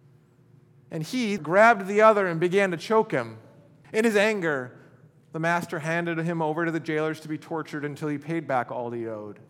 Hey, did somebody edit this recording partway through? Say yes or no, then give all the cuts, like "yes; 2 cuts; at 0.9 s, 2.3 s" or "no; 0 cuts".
yes; 2 cuts; at 1.4 s, 3.8 s